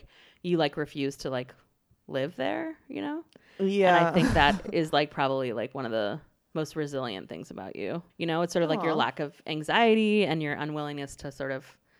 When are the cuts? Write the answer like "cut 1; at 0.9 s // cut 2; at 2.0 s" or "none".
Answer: cut 1; at 8.1 s